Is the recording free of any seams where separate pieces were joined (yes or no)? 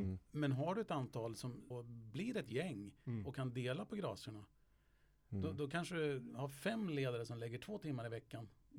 no